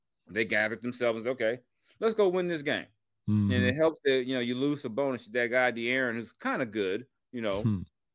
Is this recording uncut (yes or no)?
yes